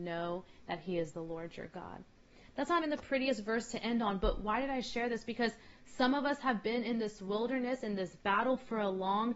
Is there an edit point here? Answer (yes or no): yes